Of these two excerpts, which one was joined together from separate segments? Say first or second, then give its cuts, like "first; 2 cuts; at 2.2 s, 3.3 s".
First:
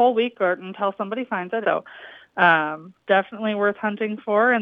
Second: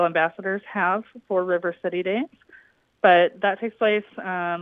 first; 1 cut; at 1.6 s